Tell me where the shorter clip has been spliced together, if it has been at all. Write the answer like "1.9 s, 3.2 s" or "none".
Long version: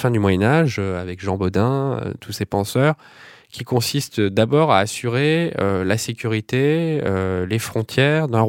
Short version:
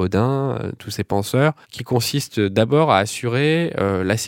1.6 s

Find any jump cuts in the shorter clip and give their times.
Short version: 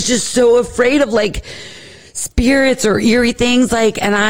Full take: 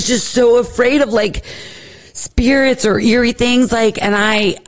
none

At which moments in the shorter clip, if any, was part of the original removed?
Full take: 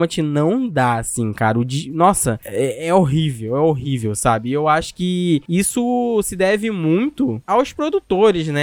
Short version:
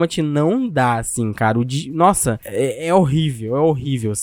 none

